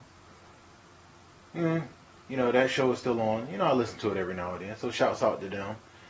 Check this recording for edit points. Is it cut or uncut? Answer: uncut